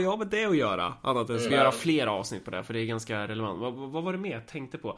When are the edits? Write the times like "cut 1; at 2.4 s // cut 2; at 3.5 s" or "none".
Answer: cut 1; at 1.5 s